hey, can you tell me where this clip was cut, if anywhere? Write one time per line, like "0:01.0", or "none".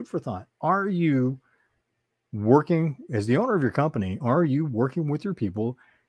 none